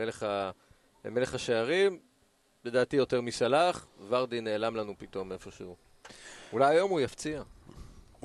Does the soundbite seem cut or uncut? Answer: uncut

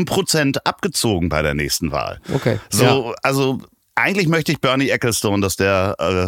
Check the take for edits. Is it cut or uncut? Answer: uncut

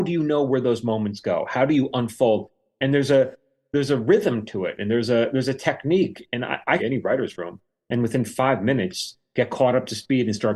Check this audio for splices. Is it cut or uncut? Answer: cut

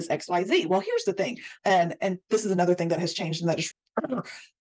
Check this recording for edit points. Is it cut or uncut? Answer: cut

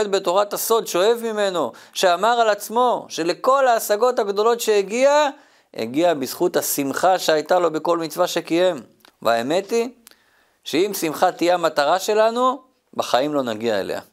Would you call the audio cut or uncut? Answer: cut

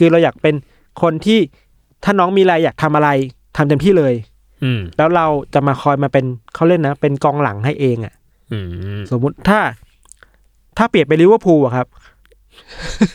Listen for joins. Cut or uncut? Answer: uncut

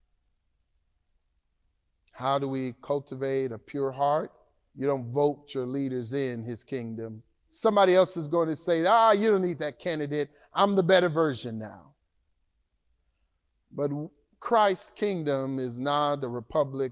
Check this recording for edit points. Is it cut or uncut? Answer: cut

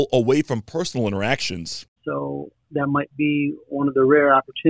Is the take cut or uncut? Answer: cut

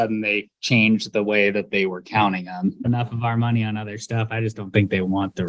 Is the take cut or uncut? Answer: cut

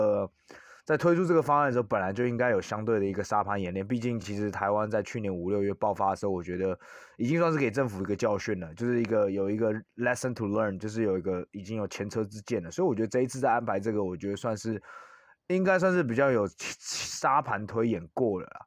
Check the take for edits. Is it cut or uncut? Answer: uncut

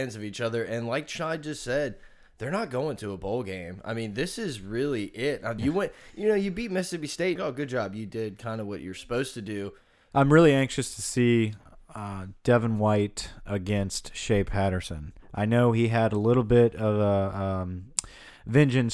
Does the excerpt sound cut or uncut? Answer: cut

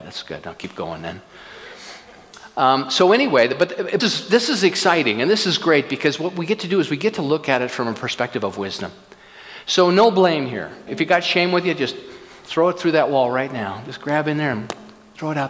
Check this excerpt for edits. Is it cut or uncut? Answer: cut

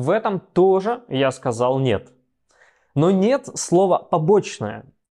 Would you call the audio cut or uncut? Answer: uncut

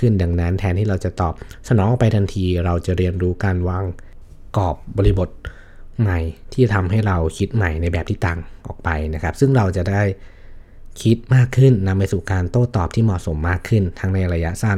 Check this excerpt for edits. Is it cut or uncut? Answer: uncut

